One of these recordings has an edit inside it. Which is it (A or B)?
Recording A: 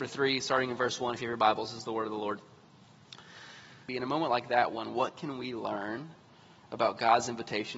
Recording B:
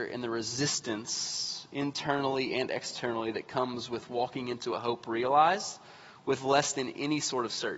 A